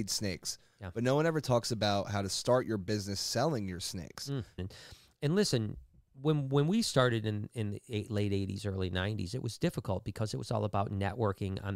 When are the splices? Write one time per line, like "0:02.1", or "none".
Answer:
0:04.6